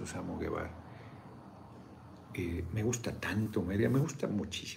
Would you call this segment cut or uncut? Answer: uncut